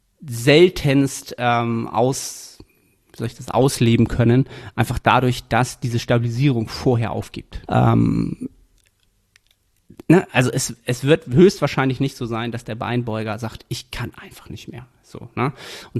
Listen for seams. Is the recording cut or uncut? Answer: cut